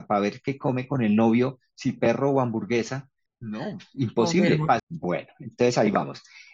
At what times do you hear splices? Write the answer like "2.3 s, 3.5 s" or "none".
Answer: 3.3 s, 4.8 s